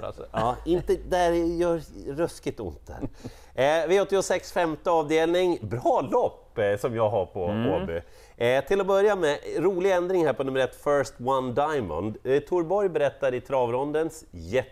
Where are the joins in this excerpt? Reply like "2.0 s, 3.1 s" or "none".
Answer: none